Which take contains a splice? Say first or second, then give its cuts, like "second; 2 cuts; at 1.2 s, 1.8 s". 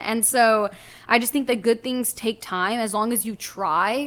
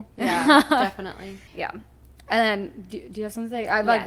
second; 1 cut; at 1.5 s